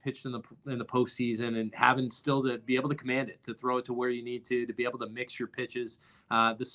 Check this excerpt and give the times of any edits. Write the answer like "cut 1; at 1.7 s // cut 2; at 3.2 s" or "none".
none